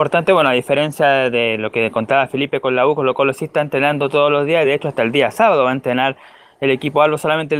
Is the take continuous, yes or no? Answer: yes